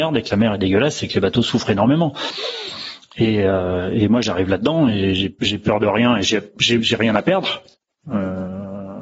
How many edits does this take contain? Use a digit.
0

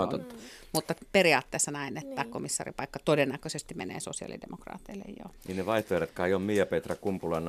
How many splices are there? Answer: 1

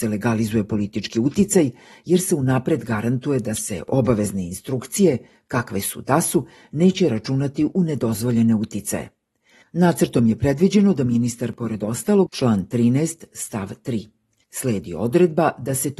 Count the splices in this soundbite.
2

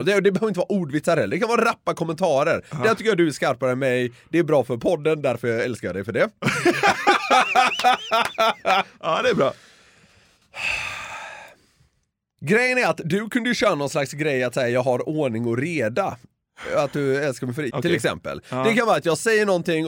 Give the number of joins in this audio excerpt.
1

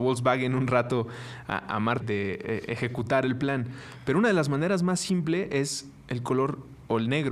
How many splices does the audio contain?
1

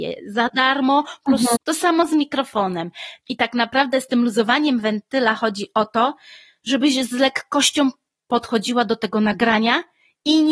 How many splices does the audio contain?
2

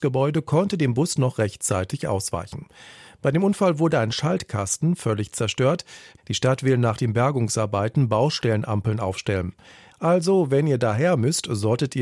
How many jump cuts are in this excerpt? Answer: 2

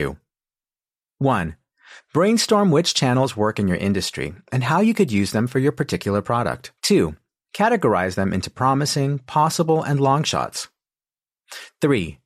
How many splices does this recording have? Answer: 1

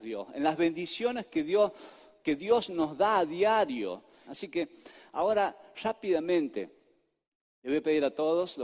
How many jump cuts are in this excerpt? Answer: 1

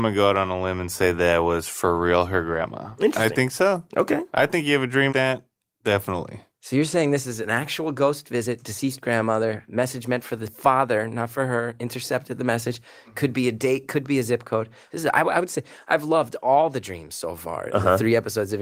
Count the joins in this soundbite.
1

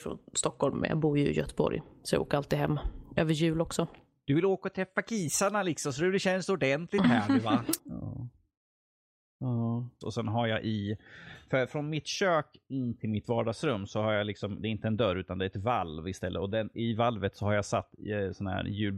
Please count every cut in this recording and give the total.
2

